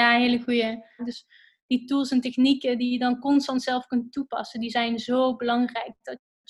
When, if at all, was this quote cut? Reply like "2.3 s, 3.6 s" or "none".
1.0 s